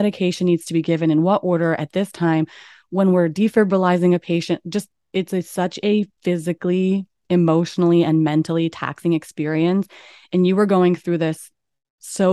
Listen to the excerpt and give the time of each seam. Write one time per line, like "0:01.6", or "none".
none

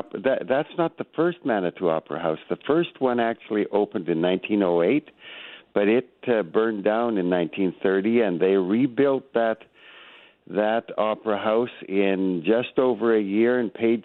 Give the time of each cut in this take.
none

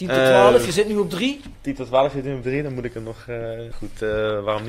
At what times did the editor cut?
0:03.7

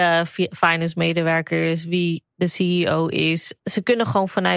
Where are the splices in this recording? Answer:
0:03.6

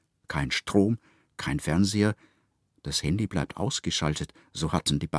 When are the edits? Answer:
none

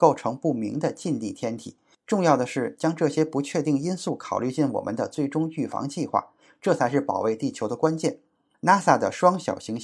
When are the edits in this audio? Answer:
none

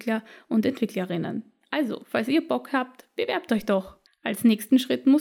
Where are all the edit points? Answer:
0:04.1

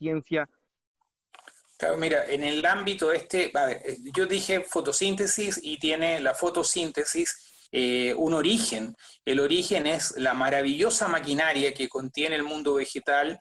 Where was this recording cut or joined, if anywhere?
none

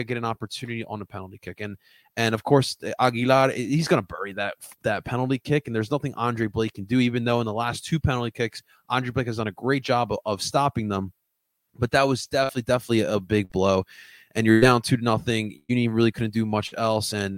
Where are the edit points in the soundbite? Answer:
none

